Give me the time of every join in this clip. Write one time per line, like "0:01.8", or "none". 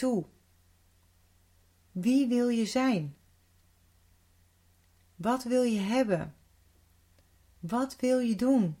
0:01.8